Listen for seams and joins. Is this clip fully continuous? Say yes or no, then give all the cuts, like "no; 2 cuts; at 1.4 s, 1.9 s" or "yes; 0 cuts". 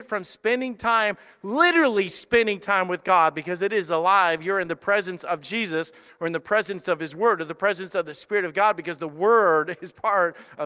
yes; 0 cuts